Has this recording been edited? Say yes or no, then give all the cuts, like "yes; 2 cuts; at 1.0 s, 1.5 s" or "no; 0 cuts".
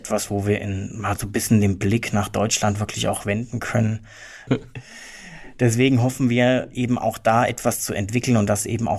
yes; 1 cut; at 4.5 s